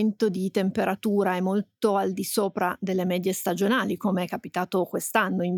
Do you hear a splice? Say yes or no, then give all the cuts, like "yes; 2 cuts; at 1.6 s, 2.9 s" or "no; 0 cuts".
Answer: no; 0 cuts